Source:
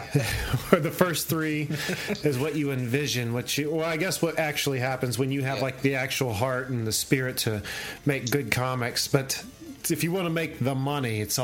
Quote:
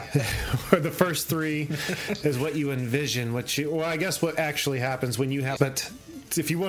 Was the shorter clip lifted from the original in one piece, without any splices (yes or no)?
no